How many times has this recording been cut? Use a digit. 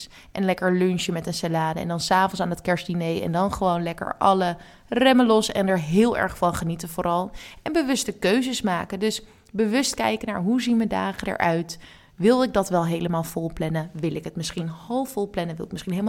0